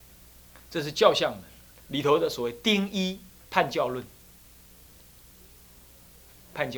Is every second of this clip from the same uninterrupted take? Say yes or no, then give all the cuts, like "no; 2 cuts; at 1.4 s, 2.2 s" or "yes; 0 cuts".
yes; 0 cuts